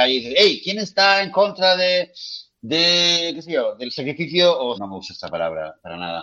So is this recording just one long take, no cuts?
no; 2 cuts; at 2.5 s, 4.7 s

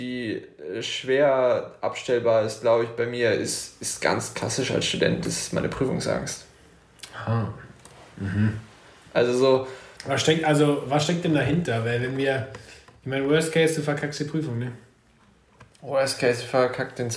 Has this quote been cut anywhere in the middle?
no; 0 cuts

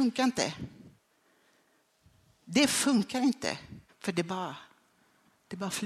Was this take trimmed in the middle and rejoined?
yes; 1 cut; at 3.9 s

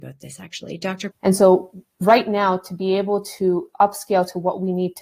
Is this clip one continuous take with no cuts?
no; 1 cut; at 1.1 s

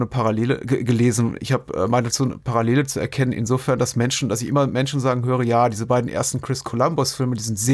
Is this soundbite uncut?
yes; 0 cuts

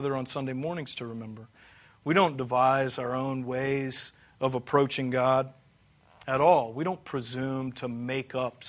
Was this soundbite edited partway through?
no; 0 cuts

